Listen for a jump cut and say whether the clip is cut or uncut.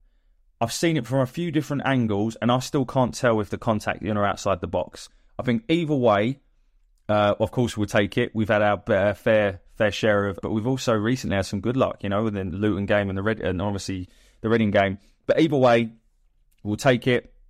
cut